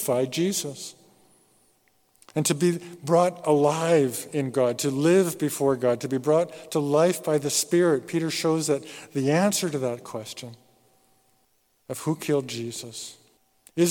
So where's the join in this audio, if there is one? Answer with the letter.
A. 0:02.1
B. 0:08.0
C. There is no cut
C